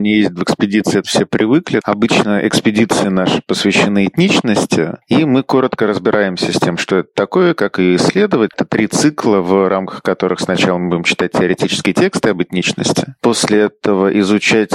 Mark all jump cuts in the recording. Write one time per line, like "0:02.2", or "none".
0:01.8
0:08.5